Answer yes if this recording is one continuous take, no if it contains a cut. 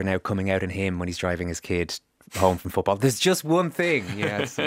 yes